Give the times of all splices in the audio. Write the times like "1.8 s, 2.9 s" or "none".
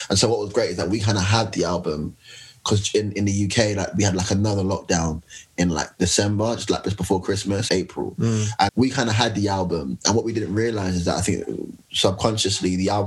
7.7 s, 8.7 s

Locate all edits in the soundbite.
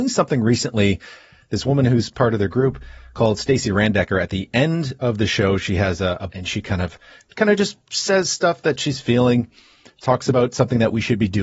6.3 s

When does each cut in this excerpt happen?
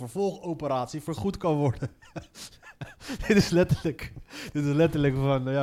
none

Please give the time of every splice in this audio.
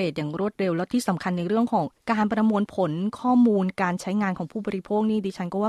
2.0 s

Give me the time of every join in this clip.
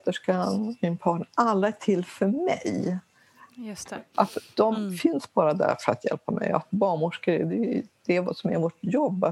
none

